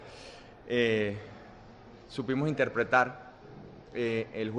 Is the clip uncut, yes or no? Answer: yes